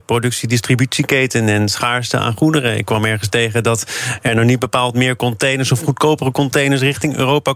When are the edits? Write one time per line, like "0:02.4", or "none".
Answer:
none